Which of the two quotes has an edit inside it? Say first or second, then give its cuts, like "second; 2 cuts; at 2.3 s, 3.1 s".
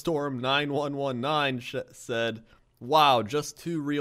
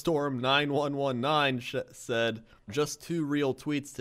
second; 1 cut; at 2.7 s